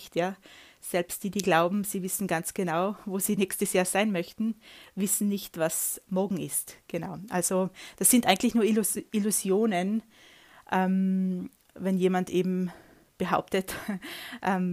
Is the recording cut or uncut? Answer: uncut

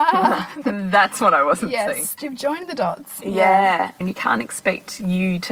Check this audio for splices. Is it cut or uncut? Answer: cut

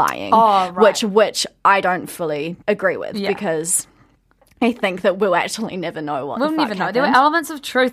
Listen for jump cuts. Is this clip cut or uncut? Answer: cut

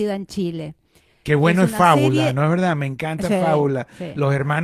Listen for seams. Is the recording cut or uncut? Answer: uncut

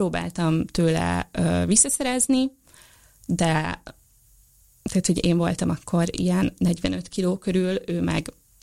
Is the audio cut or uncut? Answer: uncut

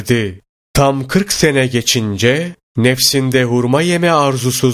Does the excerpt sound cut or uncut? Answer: uncut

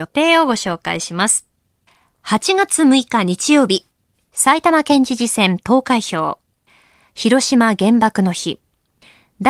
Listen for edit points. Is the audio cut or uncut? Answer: uncut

